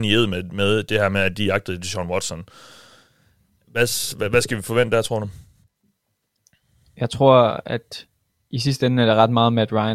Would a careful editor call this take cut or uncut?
uncut